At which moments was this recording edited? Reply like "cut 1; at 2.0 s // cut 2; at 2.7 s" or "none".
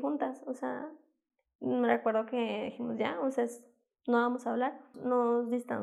cut 1; at 4.9 s